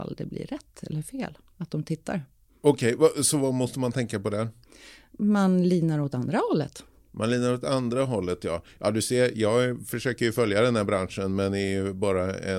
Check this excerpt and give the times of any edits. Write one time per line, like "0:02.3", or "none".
none